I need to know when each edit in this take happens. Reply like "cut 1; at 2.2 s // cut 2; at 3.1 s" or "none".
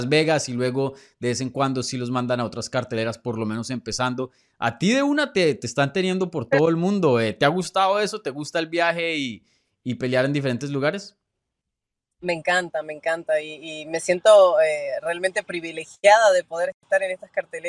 none